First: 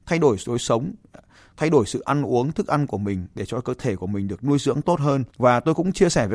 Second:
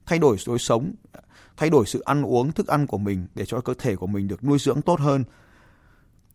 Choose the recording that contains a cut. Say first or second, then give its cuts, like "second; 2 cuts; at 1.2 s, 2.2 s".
first; 1 cut; at 5.3 s